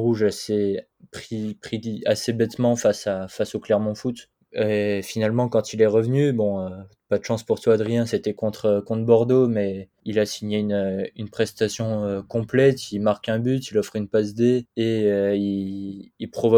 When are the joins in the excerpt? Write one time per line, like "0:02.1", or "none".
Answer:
none

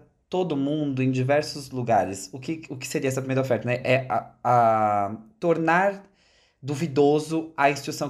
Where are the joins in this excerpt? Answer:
none

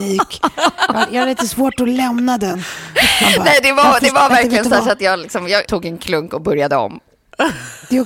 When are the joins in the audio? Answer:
0:05.6

